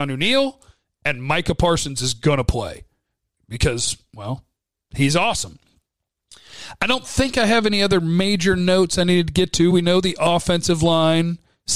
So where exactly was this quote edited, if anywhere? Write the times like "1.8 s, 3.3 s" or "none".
none